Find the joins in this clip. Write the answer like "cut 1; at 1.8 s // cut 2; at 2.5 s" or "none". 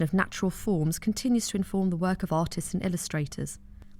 none